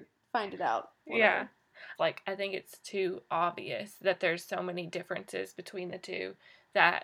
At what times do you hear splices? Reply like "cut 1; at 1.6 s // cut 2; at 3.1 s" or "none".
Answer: cut 1; at 2.0 s